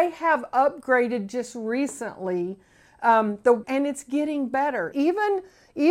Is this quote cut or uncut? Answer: cut